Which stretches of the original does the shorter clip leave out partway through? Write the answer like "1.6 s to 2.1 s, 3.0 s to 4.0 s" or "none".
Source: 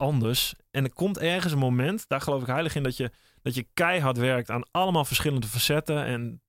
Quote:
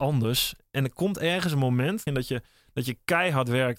2.1 s to 2.8 s